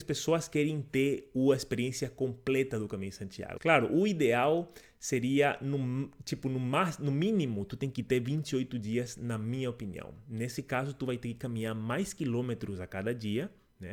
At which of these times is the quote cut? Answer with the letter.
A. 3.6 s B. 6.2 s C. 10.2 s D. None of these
A